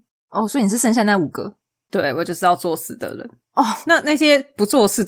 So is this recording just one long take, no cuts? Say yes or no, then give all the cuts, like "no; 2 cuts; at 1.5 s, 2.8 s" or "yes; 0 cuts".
yes; 0 cuts